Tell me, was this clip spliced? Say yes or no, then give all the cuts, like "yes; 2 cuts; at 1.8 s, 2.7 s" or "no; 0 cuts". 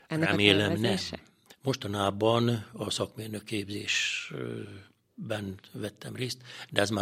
yes; 1 cut; at 1.5 s